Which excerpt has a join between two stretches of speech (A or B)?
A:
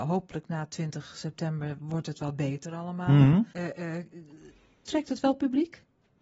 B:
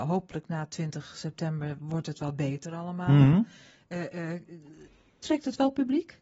A